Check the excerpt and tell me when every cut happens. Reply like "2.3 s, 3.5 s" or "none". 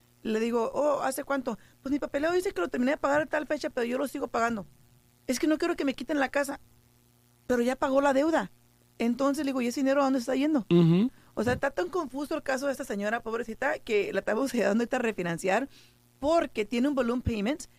5.2 s